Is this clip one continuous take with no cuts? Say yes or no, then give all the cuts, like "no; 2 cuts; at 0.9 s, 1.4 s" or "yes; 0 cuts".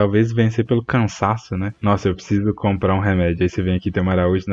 yes; 0 cuts